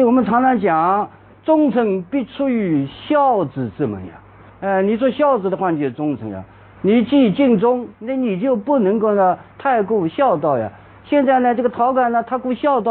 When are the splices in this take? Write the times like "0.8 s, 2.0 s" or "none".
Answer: 6.8 s